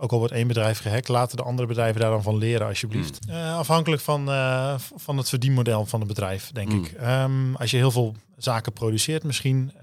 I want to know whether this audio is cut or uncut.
cut